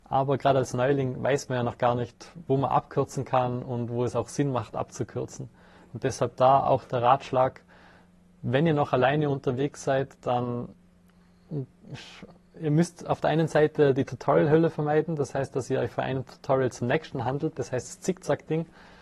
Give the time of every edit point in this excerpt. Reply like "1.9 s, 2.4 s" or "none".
none